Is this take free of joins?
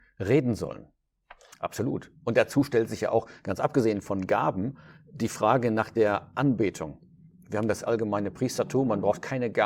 no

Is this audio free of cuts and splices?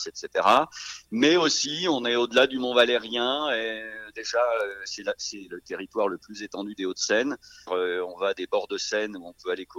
no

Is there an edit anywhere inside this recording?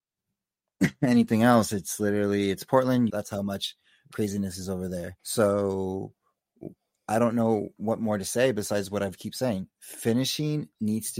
yes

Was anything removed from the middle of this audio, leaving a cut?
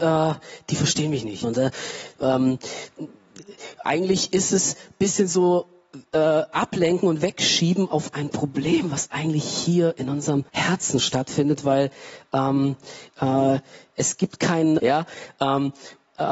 yes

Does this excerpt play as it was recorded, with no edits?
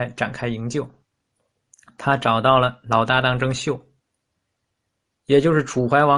yes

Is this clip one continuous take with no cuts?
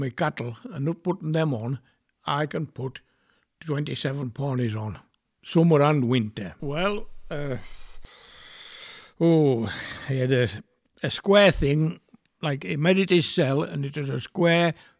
no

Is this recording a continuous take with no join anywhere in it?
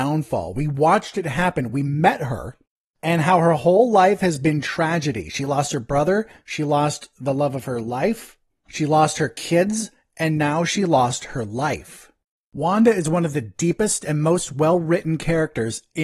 yes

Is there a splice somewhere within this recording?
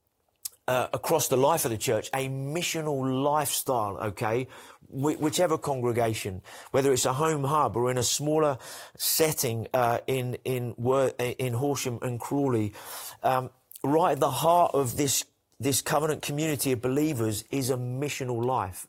no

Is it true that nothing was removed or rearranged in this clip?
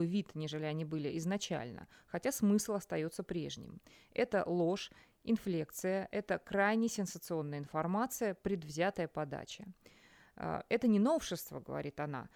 yes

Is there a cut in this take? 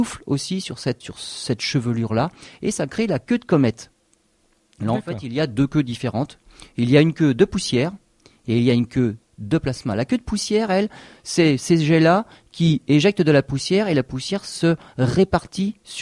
yes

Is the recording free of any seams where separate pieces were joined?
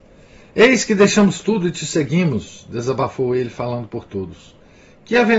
yes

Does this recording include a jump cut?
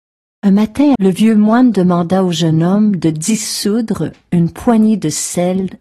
yes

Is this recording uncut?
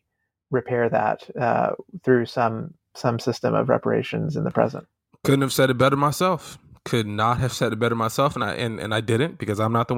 yes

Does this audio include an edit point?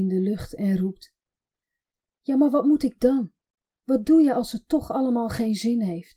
no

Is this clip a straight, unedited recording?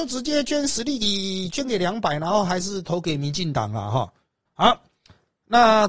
no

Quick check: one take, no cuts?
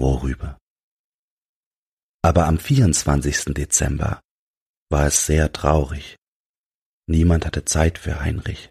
yes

